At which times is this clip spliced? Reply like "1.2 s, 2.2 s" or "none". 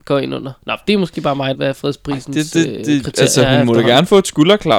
1.5 s